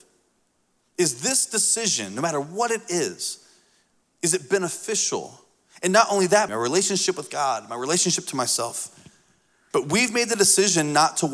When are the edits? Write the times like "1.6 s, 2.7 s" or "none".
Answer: 6.5 s, 9.7 s